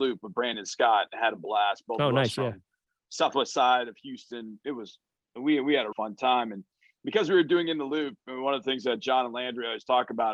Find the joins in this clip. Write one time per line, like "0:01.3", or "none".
0:05.9